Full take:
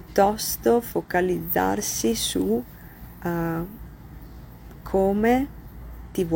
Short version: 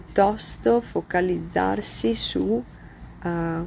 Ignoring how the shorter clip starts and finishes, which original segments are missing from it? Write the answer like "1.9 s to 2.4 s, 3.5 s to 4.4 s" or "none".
none